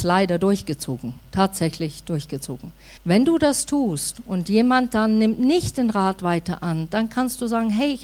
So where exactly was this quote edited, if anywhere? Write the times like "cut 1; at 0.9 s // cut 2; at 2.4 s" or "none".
cut 1; at 3.0 s